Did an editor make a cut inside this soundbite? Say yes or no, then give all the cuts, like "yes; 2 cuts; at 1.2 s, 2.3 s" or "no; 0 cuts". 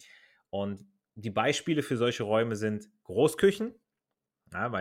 no; 0 cuts